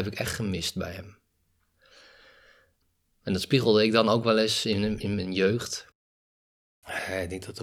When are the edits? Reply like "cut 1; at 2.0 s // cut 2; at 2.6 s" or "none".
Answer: cut 1; at 5.0 s